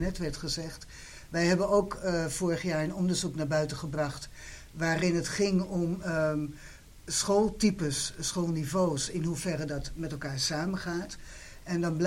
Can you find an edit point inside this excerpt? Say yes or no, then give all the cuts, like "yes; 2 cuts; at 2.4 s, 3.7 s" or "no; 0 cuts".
no; 0 cuts